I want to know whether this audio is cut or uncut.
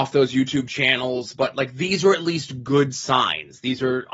uncut